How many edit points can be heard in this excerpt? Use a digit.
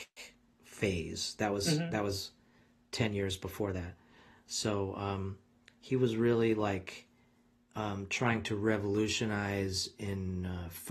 0